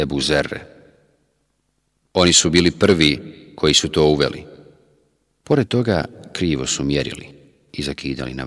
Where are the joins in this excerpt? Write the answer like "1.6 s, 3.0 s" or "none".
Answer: 2.0 s